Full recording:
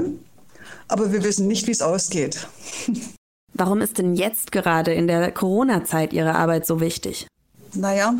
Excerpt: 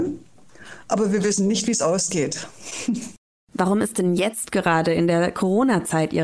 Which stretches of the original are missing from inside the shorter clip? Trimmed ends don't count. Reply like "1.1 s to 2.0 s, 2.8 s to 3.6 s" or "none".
none